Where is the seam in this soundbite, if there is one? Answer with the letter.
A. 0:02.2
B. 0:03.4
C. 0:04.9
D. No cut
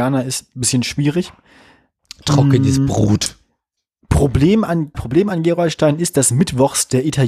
C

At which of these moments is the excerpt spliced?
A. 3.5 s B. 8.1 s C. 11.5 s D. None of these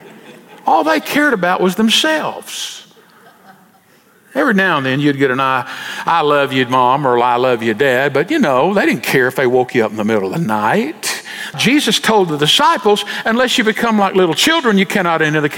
C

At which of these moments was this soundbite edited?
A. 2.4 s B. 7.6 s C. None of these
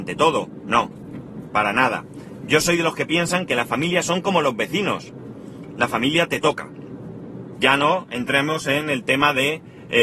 B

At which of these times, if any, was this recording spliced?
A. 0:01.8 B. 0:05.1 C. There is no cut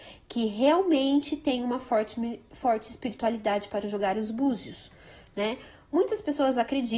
C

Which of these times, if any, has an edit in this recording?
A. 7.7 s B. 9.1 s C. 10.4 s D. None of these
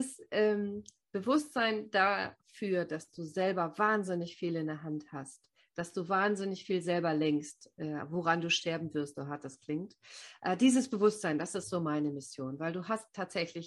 B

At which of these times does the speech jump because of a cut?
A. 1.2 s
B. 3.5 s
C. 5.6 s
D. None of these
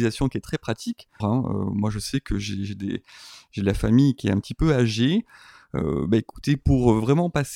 A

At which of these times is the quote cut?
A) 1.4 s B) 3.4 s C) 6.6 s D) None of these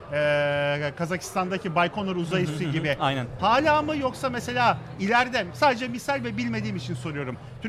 B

